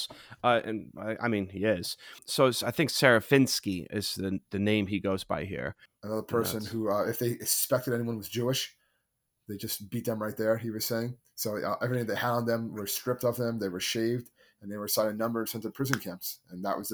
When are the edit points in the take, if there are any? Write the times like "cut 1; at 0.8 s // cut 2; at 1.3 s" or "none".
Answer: cut 1; at 5.9 s

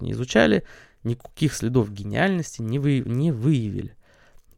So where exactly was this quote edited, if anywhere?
none

